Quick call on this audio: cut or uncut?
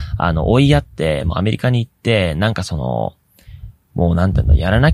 uncut